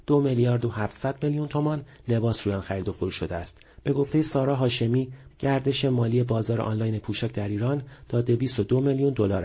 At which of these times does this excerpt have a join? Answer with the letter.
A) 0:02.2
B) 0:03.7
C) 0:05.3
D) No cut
C